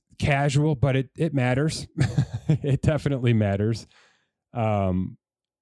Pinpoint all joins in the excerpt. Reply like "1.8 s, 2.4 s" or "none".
none